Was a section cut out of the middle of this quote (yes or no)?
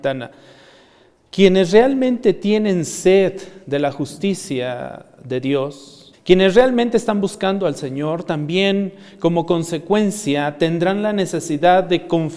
yes